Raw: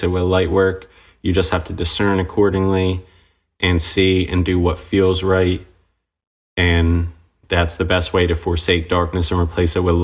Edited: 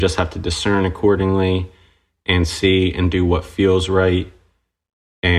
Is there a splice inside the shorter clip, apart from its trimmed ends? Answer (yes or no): no